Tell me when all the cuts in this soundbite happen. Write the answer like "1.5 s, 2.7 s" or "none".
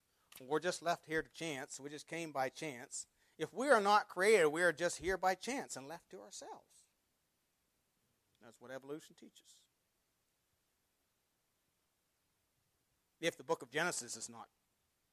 none